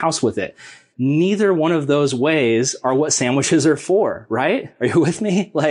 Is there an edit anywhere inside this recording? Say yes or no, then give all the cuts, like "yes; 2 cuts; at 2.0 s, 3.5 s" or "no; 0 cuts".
no; 0 cuts